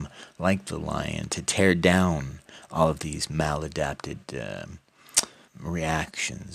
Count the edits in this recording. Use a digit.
1